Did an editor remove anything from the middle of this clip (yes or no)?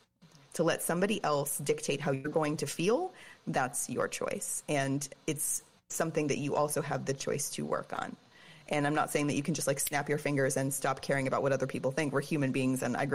no